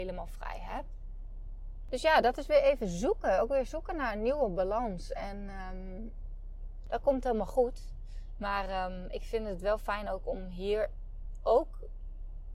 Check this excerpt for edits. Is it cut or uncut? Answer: uncut